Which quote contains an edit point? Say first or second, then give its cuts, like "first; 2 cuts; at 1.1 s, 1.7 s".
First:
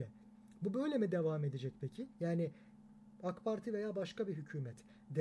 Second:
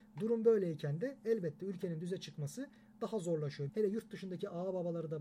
second; 1 cut; at 3.7 s